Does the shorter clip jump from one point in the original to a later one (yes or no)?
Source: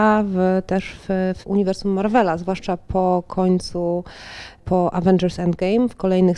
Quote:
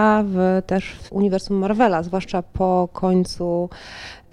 yes